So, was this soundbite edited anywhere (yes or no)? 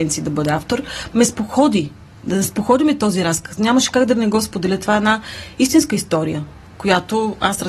no